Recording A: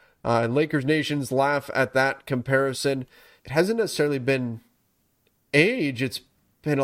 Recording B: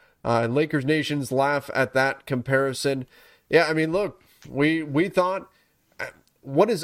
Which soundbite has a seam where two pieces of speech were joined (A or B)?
A